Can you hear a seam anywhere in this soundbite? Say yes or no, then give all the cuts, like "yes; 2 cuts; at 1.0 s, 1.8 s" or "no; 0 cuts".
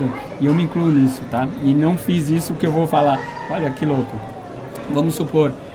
no; 0 cuts